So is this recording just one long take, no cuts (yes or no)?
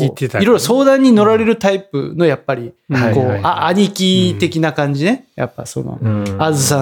yes